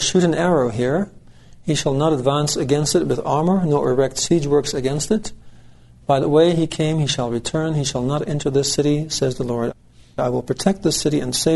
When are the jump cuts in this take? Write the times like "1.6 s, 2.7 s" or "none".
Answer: none